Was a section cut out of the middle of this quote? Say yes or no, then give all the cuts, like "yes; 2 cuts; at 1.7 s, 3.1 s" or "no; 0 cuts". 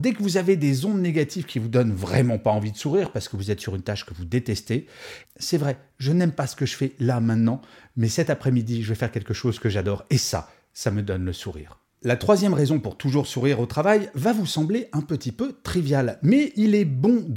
yes; 1 cut; at 5.2 s